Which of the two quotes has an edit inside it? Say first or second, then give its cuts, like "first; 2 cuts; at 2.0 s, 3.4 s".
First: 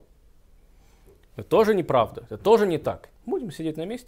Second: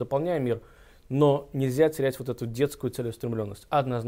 first; 1 cut; at 3.1 s